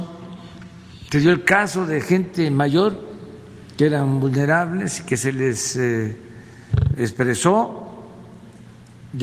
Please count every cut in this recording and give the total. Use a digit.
2